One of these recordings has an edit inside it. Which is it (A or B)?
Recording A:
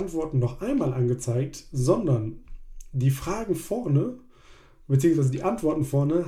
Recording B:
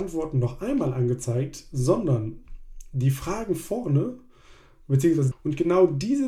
B